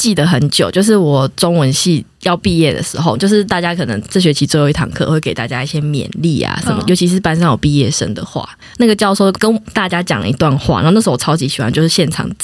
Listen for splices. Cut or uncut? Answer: cut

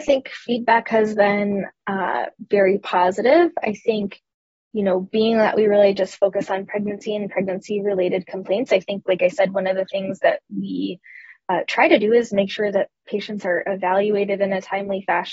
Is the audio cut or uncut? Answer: uncut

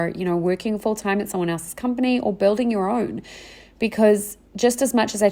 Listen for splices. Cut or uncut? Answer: uncut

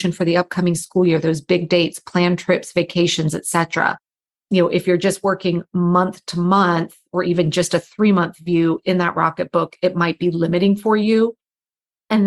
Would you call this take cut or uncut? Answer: uncut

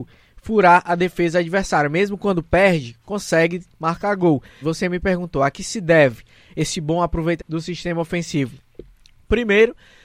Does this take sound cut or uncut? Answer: cut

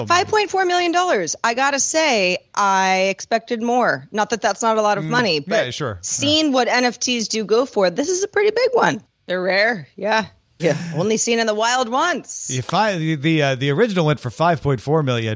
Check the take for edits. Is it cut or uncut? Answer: cut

